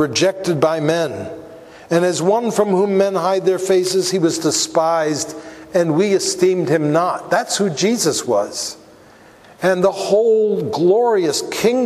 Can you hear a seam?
no; 0 cuts

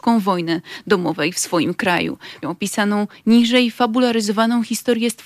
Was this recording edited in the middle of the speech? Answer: yes; 1 cut; at 2.4 s

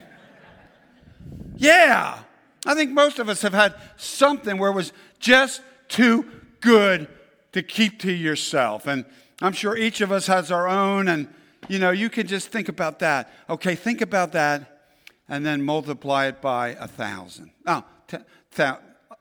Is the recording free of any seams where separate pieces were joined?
yes; 0 cuts

